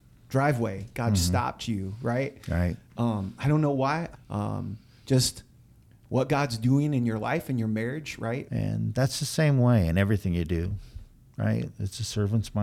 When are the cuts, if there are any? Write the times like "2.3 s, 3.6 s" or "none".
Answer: 4.1 s, 8.5 s